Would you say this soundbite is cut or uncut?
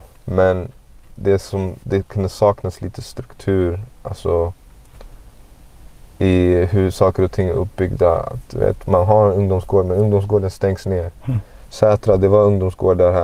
cut